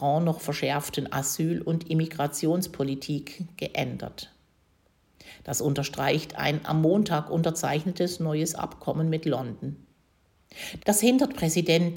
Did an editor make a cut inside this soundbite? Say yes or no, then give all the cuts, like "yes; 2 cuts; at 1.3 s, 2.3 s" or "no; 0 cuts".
yes; 1 cut; at 10.8 s